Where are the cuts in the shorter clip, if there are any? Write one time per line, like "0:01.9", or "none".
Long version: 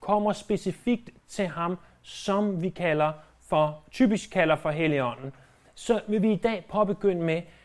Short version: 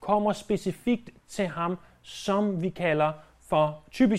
none